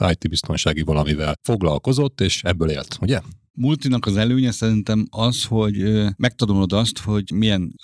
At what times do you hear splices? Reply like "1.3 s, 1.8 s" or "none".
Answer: none